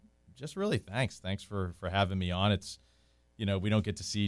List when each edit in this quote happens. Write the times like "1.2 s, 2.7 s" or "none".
none